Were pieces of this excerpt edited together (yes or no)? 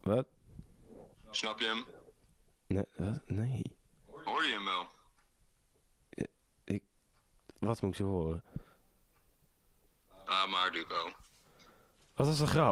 no